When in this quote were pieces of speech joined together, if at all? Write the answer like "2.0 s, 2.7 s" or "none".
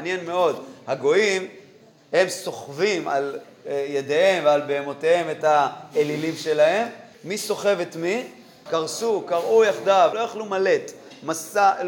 7.1 s, 8.7 s, 10.1 s